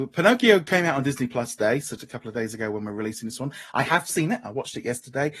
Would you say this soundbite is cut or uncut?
cut